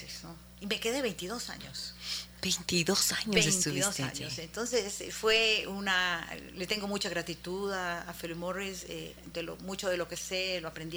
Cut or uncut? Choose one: uncut